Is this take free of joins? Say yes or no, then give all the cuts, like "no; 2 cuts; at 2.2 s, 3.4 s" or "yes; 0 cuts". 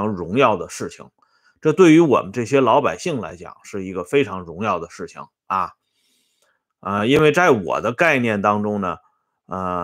yes; 0 cuts